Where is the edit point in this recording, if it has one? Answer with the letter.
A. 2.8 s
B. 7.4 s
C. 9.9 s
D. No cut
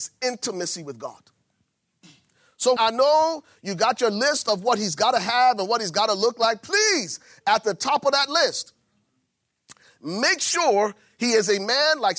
A